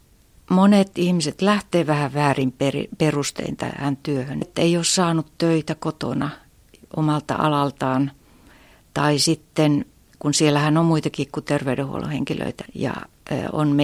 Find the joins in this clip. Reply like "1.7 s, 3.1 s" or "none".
4.4 s, 12.7 s

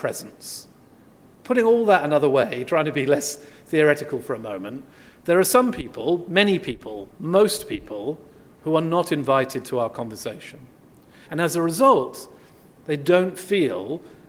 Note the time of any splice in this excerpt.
11.2 s

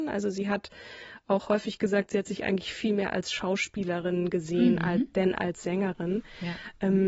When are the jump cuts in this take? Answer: none

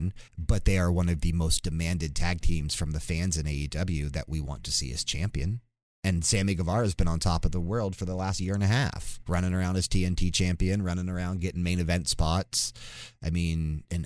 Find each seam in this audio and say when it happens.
none

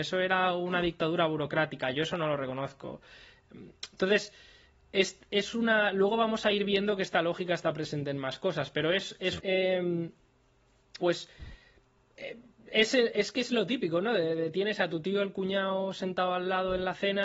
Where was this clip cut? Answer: 9.4 s, 11.0 s

